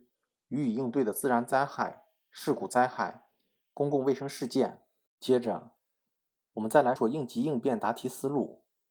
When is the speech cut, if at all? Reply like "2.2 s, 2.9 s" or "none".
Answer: 5.1 s, 7.0 s